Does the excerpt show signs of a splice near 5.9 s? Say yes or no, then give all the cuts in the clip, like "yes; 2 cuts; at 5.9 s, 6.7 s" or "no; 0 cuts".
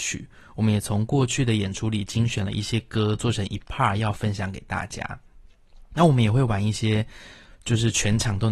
no; 0 cuts